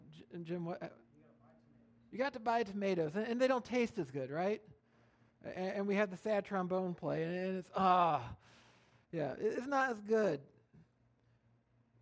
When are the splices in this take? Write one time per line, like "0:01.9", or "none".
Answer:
none